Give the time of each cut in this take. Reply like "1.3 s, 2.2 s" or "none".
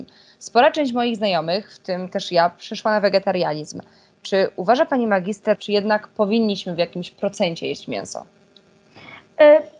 5.5 s